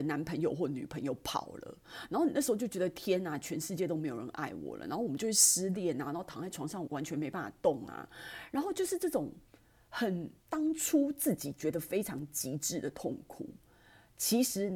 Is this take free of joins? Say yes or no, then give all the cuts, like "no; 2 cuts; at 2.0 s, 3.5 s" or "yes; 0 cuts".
no; 2 cuts; at 6.9 s, 10.4 s